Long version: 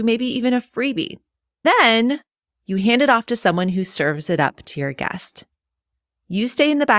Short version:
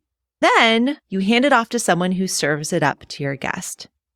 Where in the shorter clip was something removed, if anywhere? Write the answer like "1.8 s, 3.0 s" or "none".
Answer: 1.0 s